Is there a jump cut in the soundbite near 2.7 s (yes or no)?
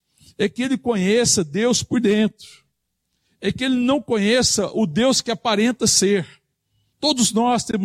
no